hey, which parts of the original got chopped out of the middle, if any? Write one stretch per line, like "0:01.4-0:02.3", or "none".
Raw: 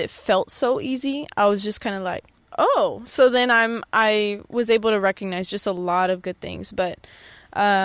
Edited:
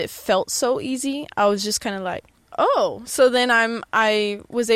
none